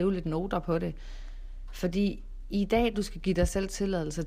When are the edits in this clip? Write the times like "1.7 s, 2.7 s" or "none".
2.9 s